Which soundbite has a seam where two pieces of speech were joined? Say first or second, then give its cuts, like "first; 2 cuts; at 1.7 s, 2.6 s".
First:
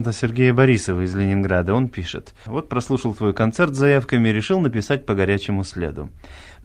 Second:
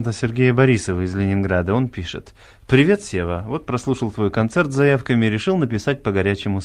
first; 1 cut; at 2.5 s